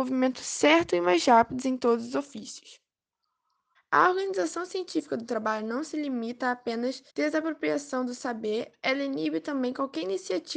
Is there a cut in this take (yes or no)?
yes